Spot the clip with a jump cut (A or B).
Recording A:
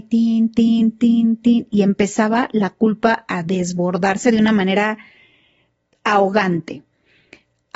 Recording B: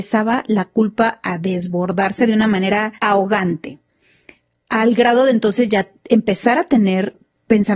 B